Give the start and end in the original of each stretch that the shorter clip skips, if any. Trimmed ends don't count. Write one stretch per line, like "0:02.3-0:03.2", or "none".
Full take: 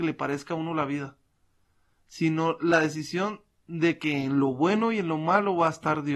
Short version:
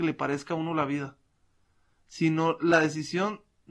none

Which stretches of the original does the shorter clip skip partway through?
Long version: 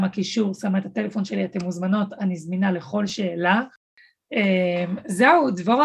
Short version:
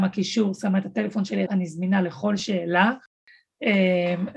0:01.5-0:02.2

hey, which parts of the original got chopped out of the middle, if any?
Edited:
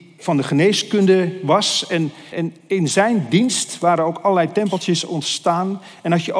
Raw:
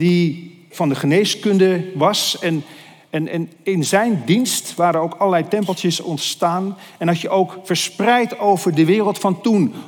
0:02.8-0:03.3

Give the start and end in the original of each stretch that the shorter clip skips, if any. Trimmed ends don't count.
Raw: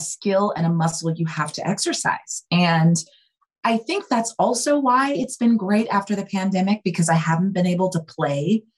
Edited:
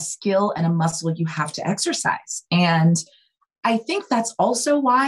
none

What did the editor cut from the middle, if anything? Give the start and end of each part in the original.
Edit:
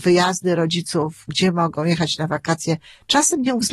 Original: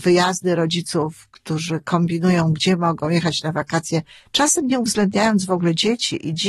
0:01.3-0:02.5

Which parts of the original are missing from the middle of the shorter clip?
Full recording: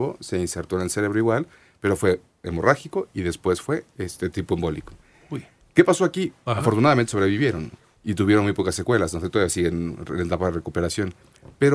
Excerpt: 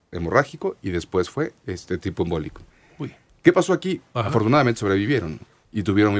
none

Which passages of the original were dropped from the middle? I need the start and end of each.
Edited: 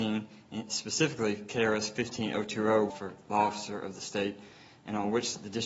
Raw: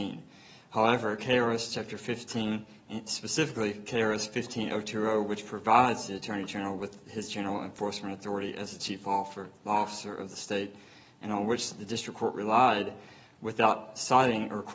0:05.3-0:09.3

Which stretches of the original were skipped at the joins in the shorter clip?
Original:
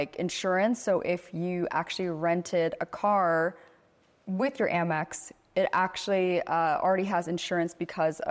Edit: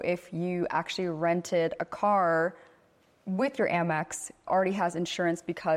0:05.5-0:06.8

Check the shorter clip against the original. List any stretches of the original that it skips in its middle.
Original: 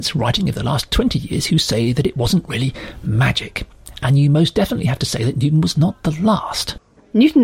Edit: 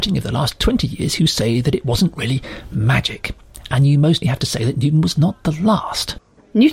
0:04.5-0:04.8

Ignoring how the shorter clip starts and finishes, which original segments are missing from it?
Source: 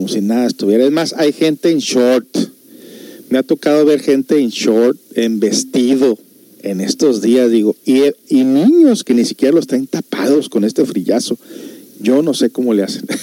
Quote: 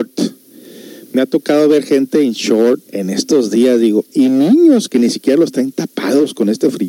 0:05.0-0:06.6
0:07.8-0:08.2

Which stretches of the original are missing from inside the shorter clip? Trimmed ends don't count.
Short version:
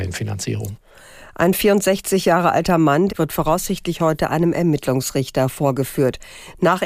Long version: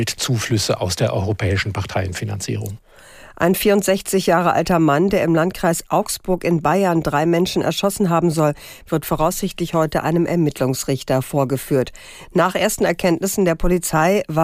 0:05.1-0:08.8

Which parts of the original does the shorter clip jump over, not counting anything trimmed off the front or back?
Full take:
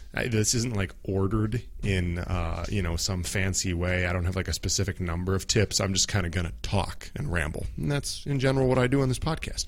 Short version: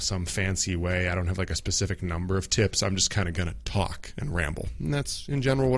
none

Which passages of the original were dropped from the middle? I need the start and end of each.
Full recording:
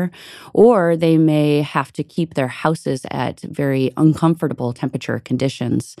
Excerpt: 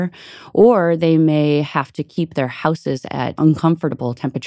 0:03.4-0:03.9

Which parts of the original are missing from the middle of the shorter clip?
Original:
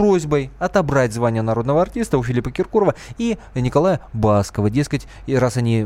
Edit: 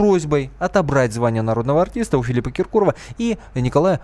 none

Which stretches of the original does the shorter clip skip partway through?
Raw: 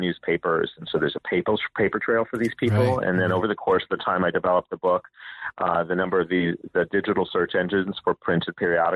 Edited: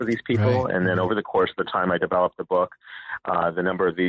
none

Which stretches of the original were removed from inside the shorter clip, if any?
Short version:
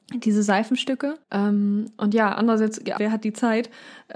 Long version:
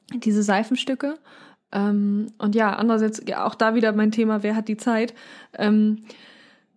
0:01.2-0:01.6
0:03.4-0:04.4

